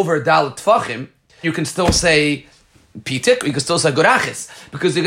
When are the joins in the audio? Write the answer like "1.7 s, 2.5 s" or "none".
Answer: 1.4 s